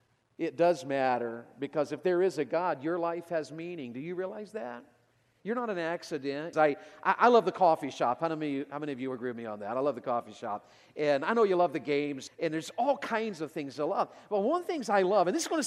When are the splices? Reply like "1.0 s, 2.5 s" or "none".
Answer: 6.5 s, 12.3 s